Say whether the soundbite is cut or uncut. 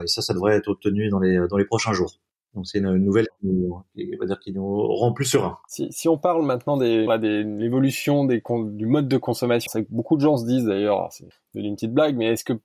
cut